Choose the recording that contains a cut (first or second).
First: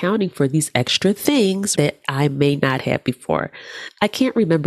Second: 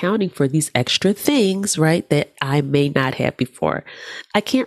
first